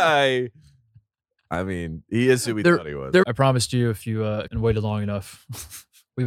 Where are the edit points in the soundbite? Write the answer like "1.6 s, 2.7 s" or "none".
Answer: 3.2 s, 4.5 s